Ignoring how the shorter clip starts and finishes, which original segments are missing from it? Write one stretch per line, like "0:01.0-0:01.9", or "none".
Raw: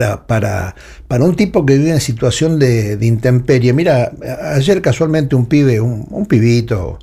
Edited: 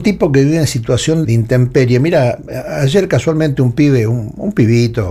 0:02.6-0:03.0